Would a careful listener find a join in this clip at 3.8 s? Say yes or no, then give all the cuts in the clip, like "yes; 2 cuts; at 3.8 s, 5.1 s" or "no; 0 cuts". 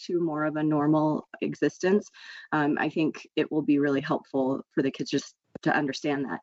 no; 1 cut; at 1.4 s